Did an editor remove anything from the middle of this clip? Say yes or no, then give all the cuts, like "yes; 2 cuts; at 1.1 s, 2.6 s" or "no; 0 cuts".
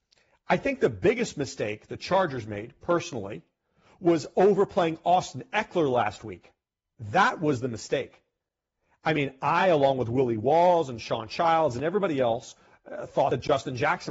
no; 0 cuts